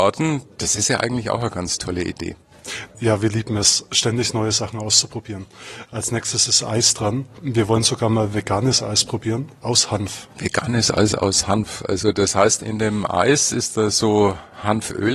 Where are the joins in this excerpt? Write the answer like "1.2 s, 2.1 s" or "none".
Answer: 2.9 s, 12.6 s